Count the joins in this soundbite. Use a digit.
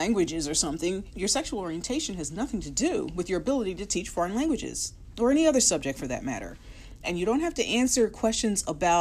2